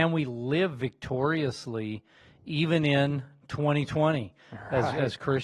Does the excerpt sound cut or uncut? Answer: uncut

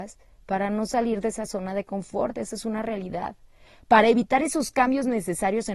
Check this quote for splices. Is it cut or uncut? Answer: uncut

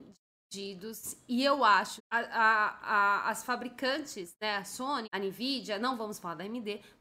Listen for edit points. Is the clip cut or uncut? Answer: cut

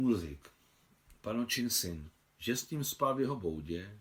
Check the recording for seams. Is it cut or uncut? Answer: cut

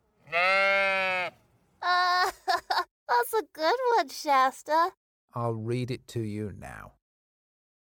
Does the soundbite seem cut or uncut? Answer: cut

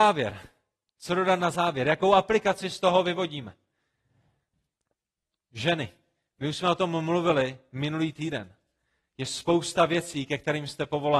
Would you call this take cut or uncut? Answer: uncut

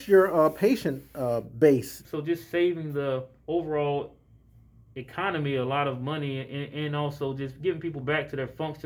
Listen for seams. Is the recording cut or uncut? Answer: cut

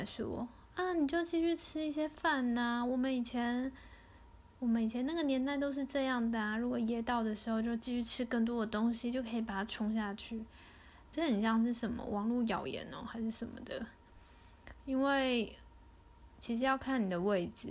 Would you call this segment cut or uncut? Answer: cut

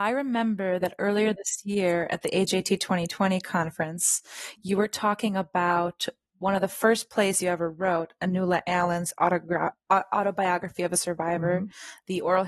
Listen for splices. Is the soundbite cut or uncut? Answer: uncut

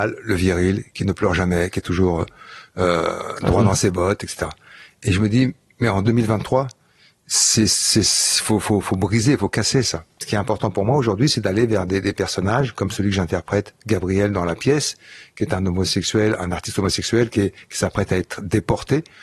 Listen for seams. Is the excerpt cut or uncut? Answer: uncut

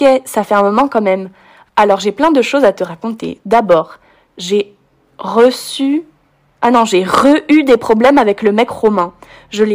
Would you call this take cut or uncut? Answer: uncut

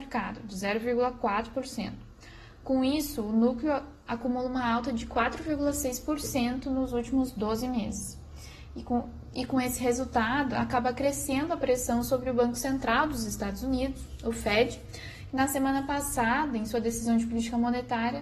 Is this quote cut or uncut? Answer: uncut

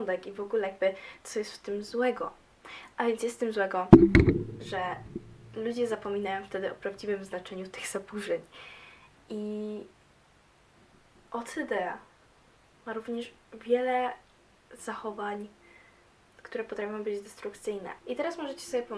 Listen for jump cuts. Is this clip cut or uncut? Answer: cut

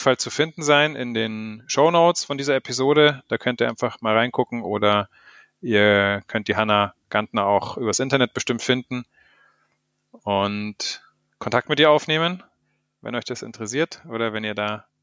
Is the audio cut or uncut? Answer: uncut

